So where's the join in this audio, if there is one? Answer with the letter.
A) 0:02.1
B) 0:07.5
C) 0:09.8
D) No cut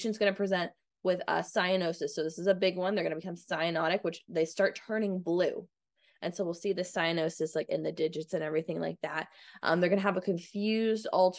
D